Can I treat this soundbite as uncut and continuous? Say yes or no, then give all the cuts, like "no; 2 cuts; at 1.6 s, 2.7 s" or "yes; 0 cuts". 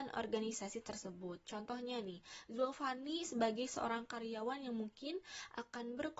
yes; 0 cuts